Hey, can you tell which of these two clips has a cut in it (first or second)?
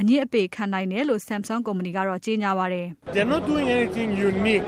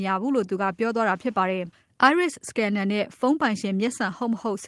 first